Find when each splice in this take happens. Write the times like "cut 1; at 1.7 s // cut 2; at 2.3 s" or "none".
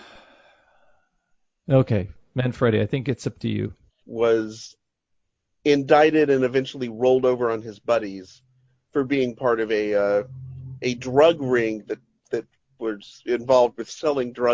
cut 1; at 4.0 s